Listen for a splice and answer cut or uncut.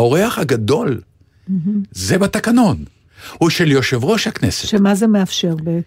uncut